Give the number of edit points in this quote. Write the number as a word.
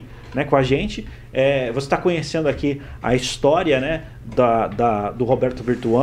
zero